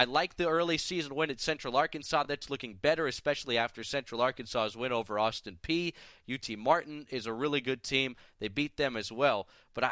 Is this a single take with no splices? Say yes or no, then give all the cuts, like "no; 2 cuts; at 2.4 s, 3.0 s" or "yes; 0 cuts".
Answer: yes; 0 cuts